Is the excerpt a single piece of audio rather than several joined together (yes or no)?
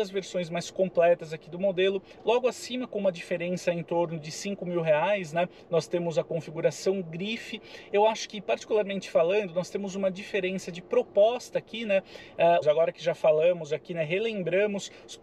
no